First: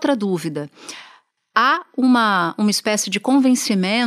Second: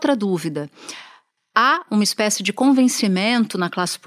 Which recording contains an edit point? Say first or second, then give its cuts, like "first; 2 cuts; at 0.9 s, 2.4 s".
second; 1 cut; at 1.9 s